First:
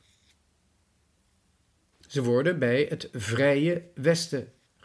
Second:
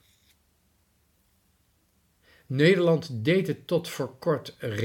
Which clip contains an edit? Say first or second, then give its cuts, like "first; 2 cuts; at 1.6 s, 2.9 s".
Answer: first; 1 cut; at 1.9 s